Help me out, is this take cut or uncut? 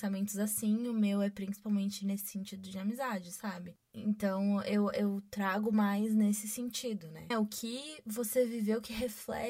cut